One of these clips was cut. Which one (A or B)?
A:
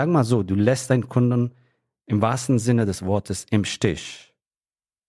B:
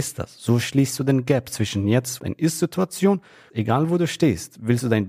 B